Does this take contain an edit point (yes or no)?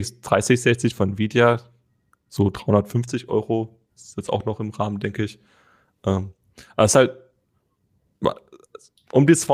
no